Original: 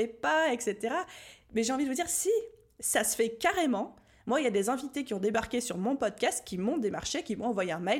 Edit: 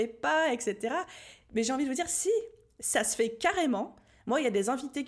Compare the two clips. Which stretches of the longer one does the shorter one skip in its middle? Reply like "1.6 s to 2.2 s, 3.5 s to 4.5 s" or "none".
none